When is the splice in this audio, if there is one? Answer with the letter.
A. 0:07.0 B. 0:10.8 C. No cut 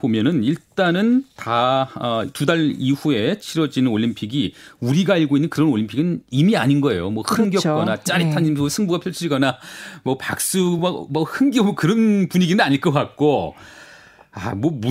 C